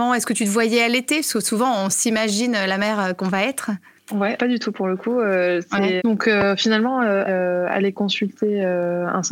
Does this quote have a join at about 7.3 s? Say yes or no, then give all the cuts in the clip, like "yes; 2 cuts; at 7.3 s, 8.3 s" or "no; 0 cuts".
yes; 3 cuts; at 4.4 s, 6.0 s, 7.3 s